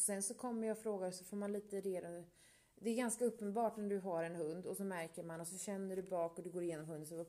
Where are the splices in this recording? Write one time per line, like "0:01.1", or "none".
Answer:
none